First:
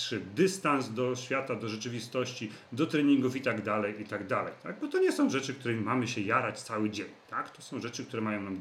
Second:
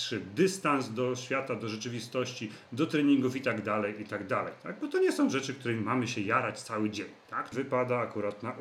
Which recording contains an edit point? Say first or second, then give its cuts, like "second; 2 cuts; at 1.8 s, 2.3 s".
second; 1 cut; at 7.5 s